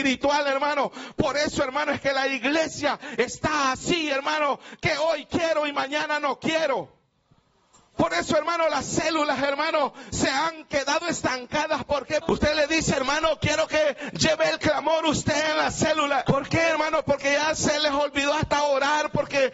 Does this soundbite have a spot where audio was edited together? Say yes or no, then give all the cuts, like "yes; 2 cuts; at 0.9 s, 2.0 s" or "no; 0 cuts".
yes; 2 cuts; at 12.2 s, 16.3 s